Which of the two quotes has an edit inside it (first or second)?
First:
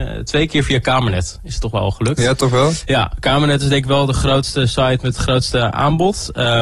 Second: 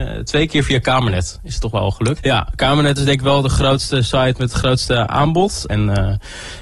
second